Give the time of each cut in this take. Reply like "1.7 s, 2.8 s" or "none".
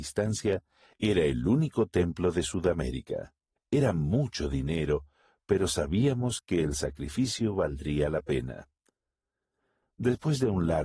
3.6 s